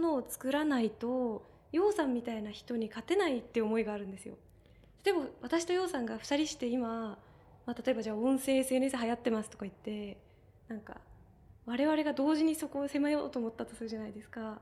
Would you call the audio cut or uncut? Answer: uncut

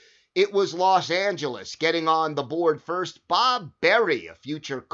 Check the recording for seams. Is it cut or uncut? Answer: uncut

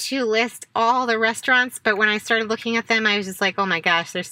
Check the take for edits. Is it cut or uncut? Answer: uncut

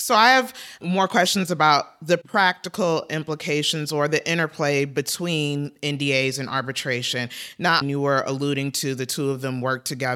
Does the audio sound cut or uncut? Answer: cut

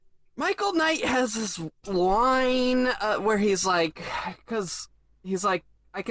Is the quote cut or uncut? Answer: uncut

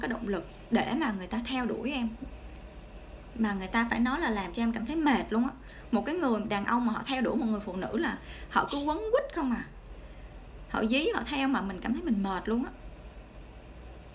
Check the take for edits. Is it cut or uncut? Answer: cut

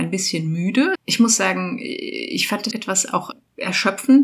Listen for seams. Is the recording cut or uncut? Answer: cut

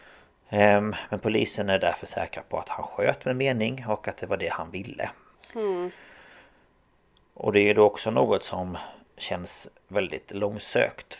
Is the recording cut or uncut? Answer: cut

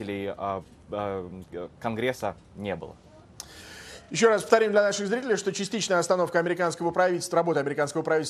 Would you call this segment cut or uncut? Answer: uncut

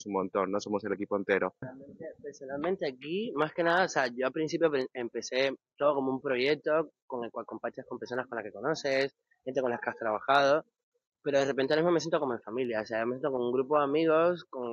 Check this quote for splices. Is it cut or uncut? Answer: cut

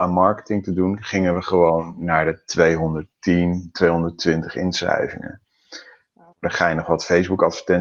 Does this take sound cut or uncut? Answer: cut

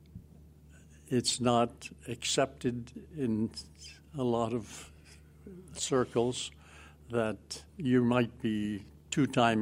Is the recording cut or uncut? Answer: cut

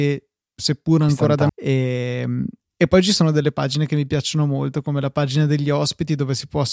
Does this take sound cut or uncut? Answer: cut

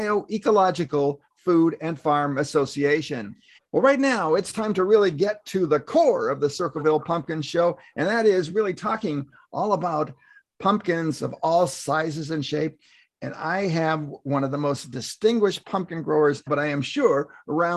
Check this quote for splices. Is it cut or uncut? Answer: cut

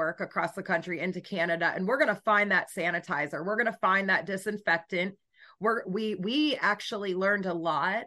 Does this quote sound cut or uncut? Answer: uncut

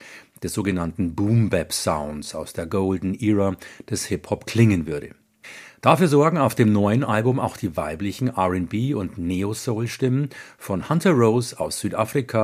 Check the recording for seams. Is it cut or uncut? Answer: uncut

